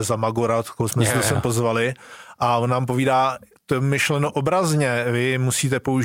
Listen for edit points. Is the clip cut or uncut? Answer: uncut